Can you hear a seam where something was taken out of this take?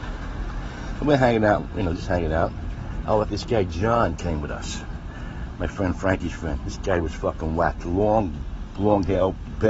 yes; 1 cut; at 3.2 s

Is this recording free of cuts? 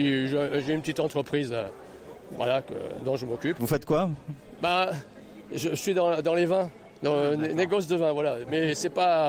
no; 1 cut; at 3.6 s

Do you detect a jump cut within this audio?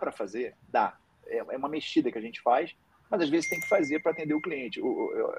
no; 0 cuts

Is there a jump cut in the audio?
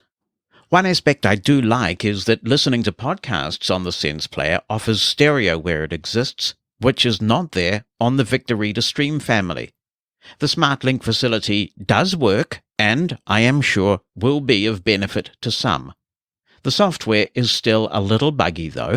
no; 0 cuts

